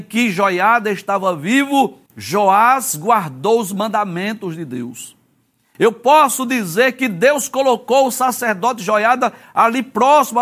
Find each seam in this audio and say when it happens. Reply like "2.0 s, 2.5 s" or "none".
2.1 s